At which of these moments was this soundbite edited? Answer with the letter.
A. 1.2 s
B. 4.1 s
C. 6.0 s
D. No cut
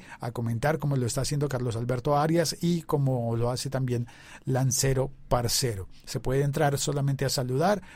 C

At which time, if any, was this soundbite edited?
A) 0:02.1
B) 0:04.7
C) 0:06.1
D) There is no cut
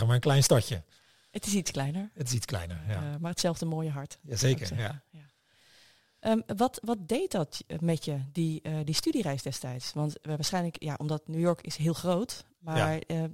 D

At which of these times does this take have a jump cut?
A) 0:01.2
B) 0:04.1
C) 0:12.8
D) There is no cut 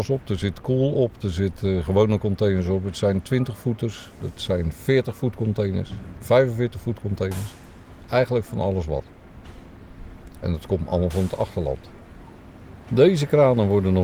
C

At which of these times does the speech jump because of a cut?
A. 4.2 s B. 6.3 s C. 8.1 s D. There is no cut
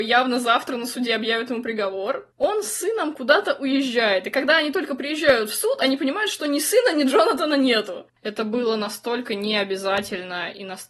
C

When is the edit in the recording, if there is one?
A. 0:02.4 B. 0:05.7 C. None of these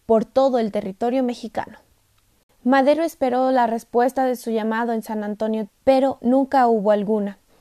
B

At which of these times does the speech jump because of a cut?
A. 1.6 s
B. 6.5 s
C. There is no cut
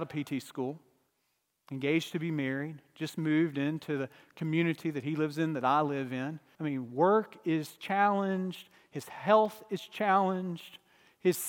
B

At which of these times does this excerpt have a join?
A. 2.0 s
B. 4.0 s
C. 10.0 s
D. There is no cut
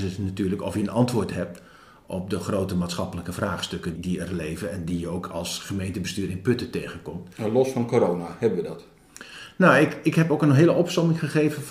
B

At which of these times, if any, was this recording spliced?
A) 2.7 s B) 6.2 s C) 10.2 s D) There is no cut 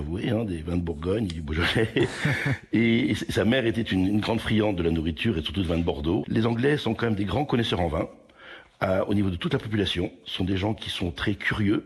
B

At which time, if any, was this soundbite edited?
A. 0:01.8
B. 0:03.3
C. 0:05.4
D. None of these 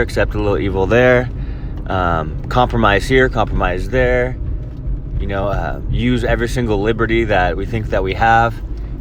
D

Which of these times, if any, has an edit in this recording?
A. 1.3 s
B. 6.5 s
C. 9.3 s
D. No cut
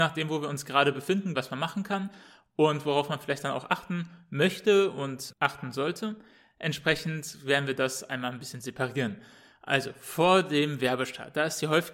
A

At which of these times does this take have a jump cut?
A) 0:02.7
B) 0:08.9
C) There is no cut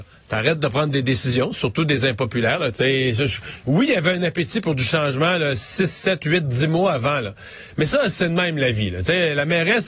A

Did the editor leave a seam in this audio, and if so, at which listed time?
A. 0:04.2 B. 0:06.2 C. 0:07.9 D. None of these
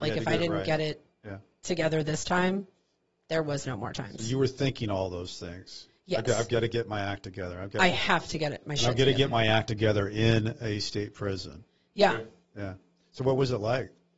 D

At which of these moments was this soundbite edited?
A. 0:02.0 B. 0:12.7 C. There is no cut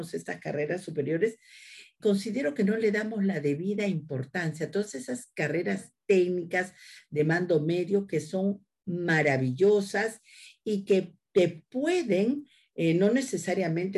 A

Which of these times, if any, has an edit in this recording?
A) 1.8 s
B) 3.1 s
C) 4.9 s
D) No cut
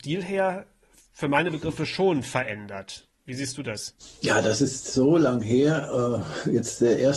D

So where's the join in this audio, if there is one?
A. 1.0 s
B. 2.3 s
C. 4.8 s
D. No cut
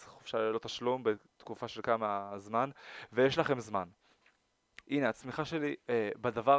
C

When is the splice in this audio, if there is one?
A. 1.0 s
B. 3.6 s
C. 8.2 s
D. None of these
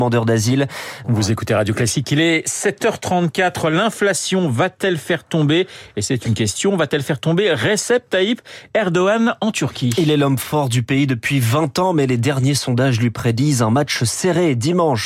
A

